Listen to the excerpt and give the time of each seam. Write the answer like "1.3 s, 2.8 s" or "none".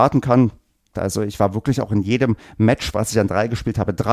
0.9 s

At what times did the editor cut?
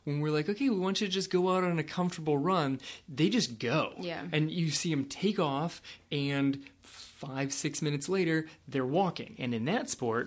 9.3 s

